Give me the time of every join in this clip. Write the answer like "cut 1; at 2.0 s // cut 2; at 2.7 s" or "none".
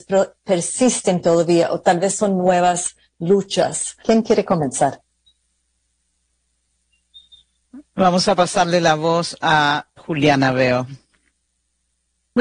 cut 1; at 4.0 s // cut 2; at 10.0 s